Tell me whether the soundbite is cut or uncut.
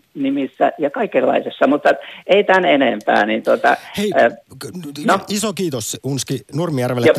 uncut